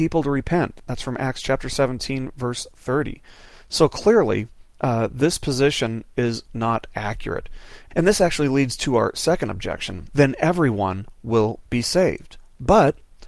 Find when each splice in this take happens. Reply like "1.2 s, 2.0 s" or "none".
10.1 s